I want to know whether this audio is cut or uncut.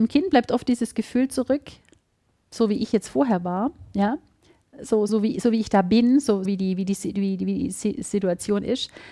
cut